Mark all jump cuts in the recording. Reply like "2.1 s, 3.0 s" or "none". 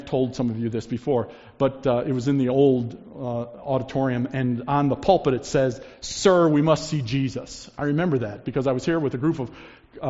none